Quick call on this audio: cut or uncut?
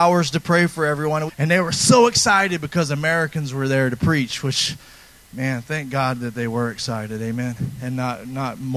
cut